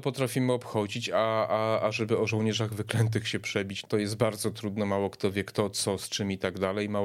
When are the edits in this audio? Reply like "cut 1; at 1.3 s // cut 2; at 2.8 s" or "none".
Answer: cut 1; at 3.8 s